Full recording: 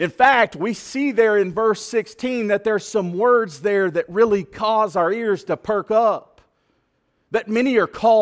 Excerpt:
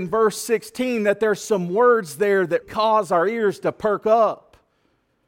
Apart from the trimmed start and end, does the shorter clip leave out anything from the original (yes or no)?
yes